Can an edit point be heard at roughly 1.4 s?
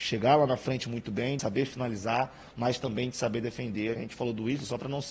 no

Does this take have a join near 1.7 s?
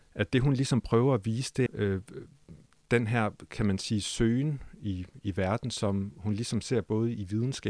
yes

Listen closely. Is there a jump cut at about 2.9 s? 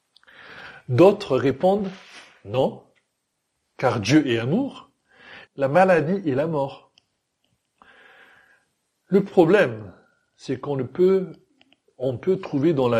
no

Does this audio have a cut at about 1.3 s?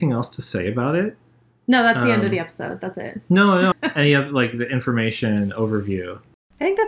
no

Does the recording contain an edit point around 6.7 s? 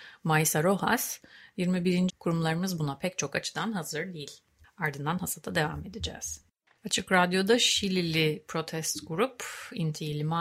no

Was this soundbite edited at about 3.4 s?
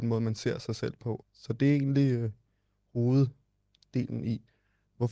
no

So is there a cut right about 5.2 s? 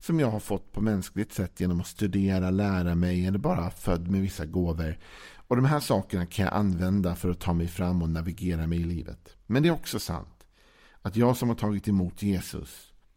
no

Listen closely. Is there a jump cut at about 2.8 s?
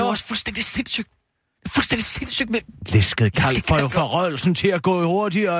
yes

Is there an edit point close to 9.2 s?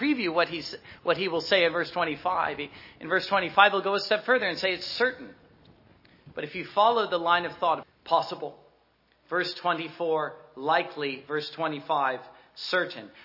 no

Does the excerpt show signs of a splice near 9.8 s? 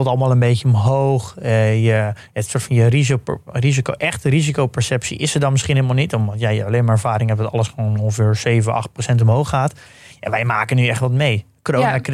no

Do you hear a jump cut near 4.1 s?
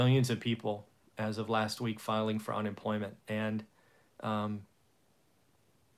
no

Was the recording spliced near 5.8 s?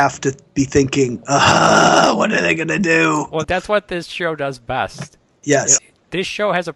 yes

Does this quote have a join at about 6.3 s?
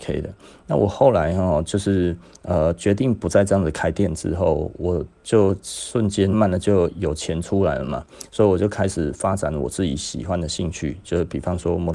yes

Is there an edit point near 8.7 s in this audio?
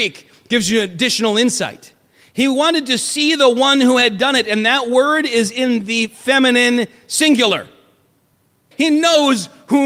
yes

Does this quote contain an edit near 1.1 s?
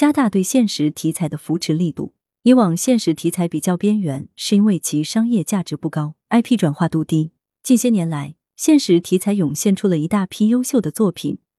no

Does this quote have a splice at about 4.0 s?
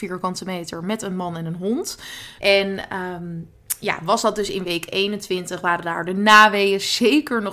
no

